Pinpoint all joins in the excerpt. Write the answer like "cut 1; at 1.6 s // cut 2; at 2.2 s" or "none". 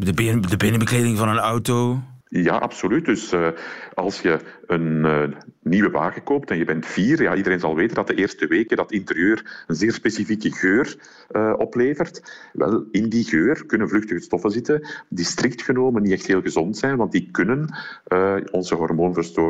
cut 1; at 2.2 s

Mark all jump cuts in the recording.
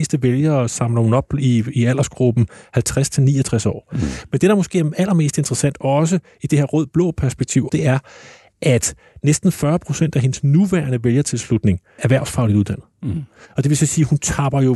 cut 1; at 7.7 s // cut 2; at 12.0 s

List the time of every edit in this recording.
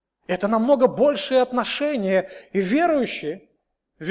none

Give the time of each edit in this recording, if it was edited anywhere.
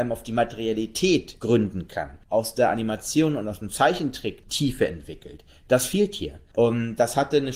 cut 1; at 6.5 s

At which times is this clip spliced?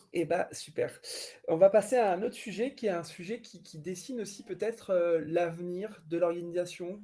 none

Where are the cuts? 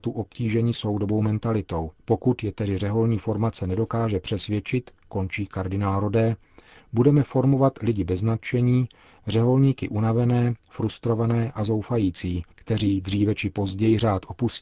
cut 1; at 2.0 s // cut 2; at 12.5 s

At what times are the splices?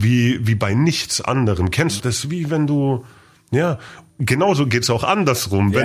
cut 1; at 2.0 s

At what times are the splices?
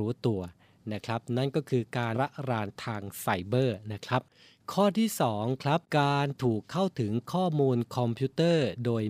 cut 1; at 2.1 s // cut 2; at 5.9 s

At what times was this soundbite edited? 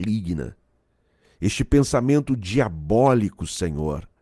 none

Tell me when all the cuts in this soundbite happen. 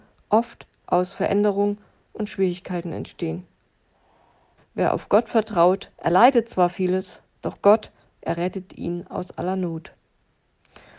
cut 1; at 4.6 s // cut 2; at 5.9 s

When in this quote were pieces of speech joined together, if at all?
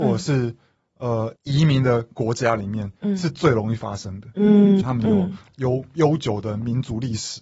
cut 1; at 1.4 s // cut 2; at 4.8 s

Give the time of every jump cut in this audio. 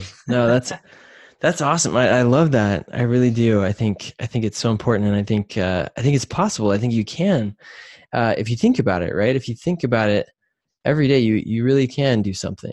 none

